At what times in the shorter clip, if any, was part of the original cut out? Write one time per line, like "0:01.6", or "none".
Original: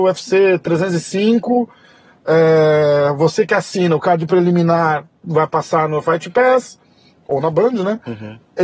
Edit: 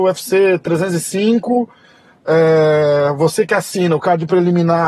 none